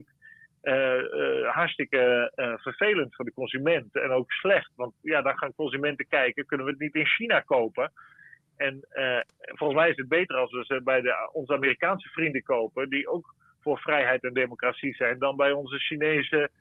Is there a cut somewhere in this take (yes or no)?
no